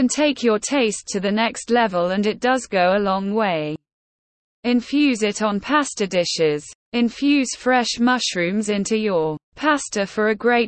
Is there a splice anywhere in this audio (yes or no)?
yes